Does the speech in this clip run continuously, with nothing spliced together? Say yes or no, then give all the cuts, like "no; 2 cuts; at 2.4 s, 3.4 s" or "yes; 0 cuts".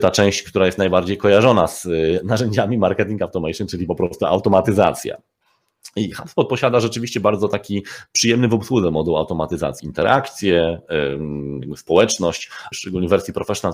no; 2 cuts; at 9.8 s, 12.7 s